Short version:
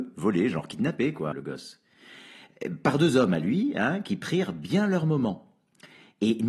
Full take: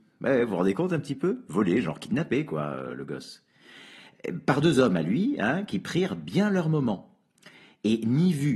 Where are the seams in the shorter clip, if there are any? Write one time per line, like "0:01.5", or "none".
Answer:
0:01.3